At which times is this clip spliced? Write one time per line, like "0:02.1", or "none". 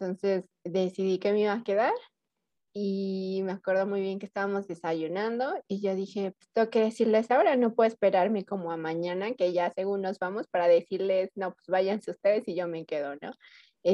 none